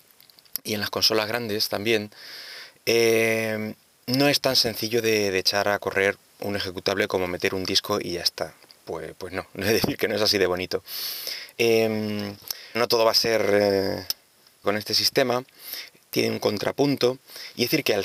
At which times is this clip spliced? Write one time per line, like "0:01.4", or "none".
0:11.6
0:12.7
0:14.6